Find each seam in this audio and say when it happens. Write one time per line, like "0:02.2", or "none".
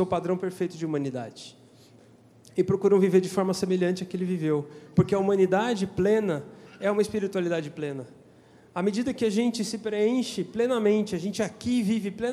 none